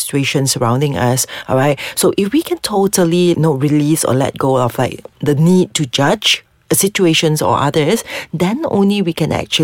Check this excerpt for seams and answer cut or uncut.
cut